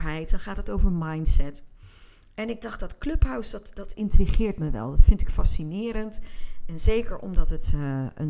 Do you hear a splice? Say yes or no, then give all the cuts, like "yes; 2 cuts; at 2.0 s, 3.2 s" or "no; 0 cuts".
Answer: no; 0 cuts